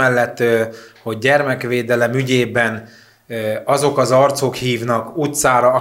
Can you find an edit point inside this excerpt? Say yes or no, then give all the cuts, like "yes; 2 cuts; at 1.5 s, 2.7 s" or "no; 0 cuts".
no; 0 cuts